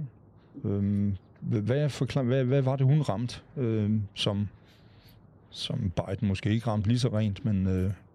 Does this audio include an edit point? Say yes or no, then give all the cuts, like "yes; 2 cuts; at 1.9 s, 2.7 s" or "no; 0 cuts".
no; 0 cuts